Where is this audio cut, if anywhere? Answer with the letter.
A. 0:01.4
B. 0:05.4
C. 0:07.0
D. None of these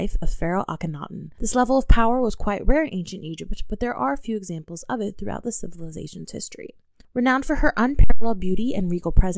A